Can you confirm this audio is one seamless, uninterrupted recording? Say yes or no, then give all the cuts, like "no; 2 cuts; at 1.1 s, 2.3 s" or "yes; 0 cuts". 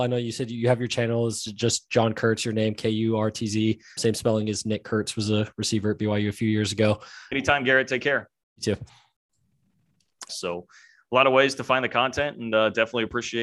no; 3 cuts; at 4.0 s, 7.3 s, 10.3 s